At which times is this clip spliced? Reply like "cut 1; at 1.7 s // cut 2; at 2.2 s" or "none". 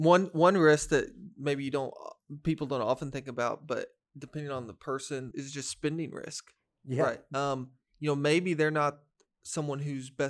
cut 1; at 5.3 s // cut 2; at 7.3 s

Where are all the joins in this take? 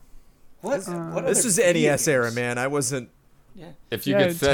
cut 1; at 3.5 s

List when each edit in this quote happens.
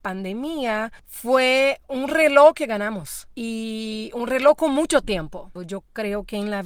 cut 1; at 5.6 s

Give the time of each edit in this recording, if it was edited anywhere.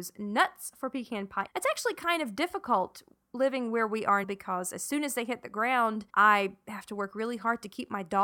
cut 1; at 1.5 s // cut 2; at 4.2 s // cut 3; at 6.1 s

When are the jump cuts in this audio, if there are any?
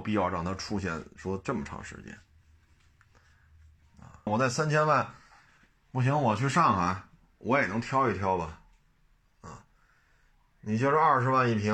cut 1; at 4.3 s

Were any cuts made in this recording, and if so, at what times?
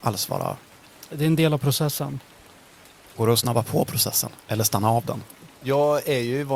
none

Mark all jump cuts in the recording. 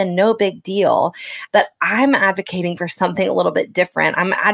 cut 1; at 1.5 s

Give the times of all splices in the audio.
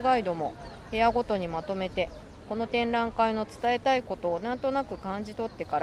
cut 1; at 2.4 s

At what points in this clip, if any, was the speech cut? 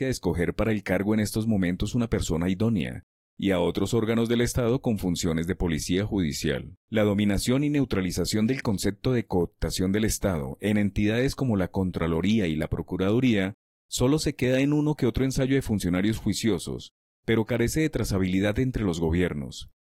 cut 1; at 6.8 s

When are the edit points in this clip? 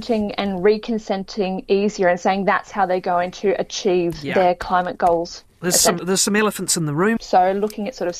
cut 1; at 6.0 s // cut 2; at 7.2 s

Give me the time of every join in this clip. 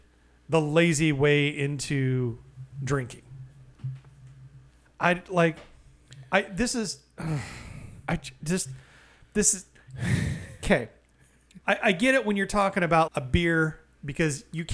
cut 1; at 4.9 s // cut 2; at 11.6 s // cut 3; at 13.1 s

